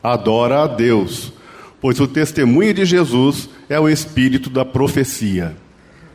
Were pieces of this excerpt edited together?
no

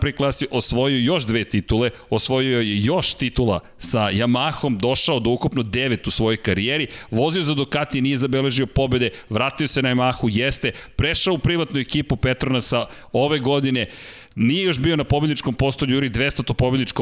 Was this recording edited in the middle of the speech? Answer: no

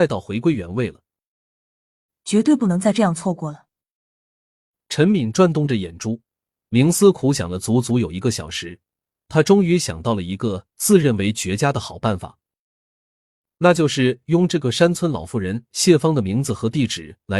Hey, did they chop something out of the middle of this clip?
no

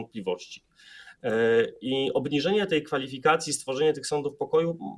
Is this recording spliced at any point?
no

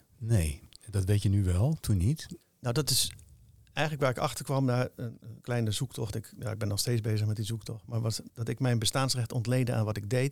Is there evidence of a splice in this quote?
yes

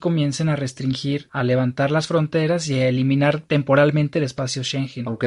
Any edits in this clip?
no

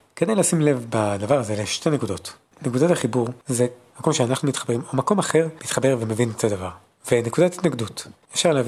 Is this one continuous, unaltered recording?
no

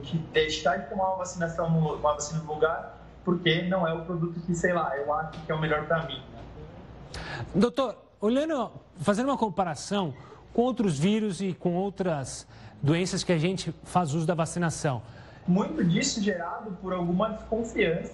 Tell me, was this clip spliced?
yes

